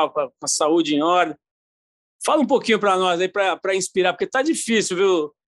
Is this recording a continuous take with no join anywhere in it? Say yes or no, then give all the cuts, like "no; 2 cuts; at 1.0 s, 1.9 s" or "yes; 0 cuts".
yes; 0 cuts